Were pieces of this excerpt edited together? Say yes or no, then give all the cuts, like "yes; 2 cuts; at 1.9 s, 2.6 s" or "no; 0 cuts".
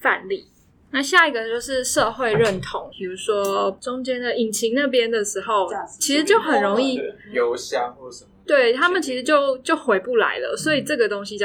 yes; 1 cut; at 2.9 s